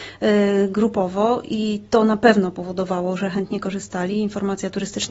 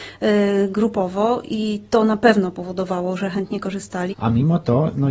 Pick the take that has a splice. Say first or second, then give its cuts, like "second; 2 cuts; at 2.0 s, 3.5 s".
second; 1 cut; at 4.1 s